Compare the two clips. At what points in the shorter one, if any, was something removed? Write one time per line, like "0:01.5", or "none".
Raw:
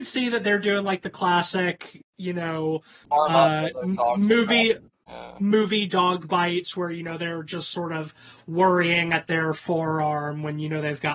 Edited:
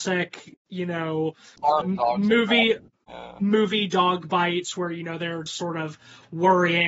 0:01.8
0:05.5